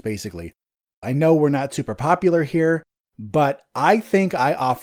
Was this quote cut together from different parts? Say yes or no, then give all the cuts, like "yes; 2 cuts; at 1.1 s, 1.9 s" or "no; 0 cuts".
yes; 1 cut; at 1.0 s